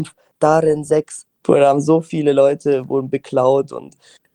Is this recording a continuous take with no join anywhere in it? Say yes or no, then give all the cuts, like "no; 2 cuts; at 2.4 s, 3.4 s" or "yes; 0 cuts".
no; 1 cut; at 1.4 s